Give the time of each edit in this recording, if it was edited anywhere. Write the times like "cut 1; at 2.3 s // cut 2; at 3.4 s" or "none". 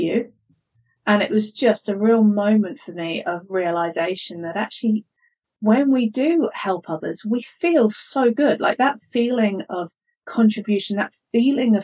none

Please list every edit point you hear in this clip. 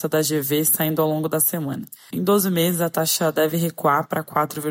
cut 1; at 2.1 s

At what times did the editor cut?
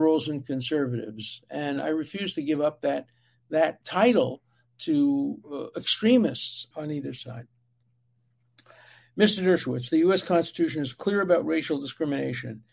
cut 1; at 3.8 s // cut 2; at 6.7 s

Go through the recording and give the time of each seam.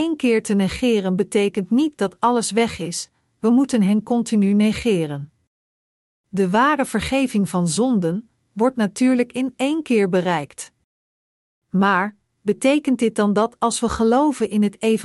none

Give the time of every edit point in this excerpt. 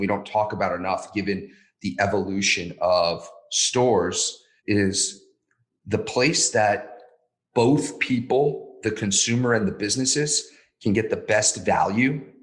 cut 1; at 4.6 s

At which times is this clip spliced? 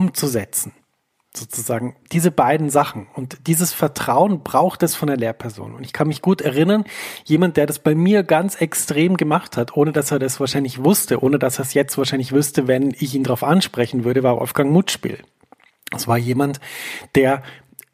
none

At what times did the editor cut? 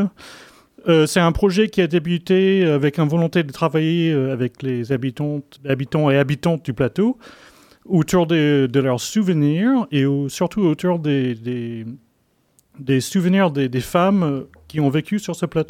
cut 1; at 5.6 s

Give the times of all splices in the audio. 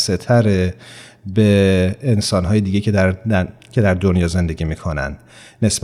none

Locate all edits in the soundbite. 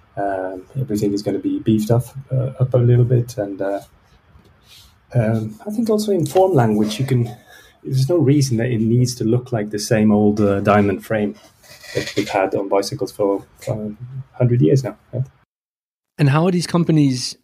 none

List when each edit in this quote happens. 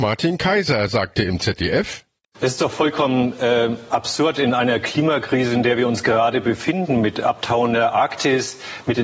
none

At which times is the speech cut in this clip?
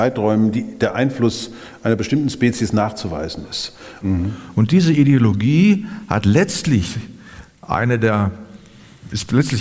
cut 1; at 4.0 s

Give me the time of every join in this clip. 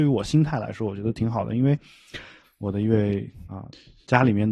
cut 1; at 2.4 s

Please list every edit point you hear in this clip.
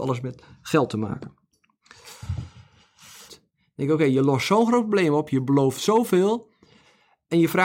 cut 1; at 3.3 s

